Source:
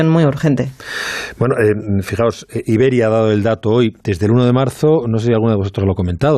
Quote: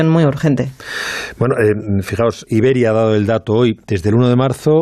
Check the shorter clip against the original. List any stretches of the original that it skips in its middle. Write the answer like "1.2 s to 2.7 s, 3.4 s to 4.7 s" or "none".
2.5 s to 2.6 s